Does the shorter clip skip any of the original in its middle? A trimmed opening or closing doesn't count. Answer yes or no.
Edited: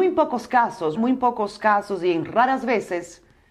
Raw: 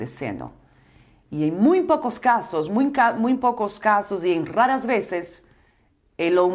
yes